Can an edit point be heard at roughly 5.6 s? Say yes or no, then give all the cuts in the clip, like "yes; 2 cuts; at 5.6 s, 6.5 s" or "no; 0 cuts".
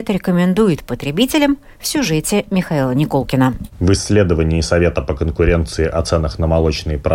no; 1 cut; at 3.7 s